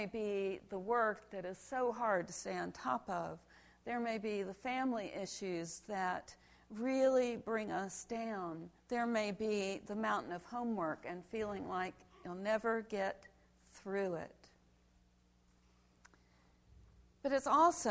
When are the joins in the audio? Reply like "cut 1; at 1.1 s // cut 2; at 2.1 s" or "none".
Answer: cut 1; at 8.8 s